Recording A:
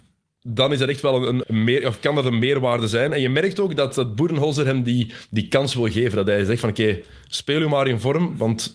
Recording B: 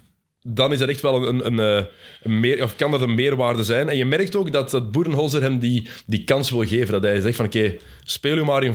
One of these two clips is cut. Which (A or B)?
A